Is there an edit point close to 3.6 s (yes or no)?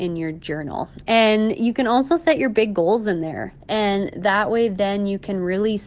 yes